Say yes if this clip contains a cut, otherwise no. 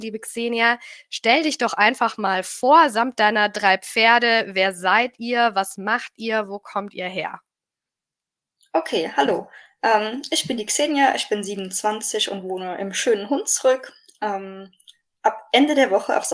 no